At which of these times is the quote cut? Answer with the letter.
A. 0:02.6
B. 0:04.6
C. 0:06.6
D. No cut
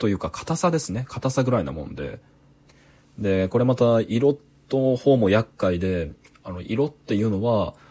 D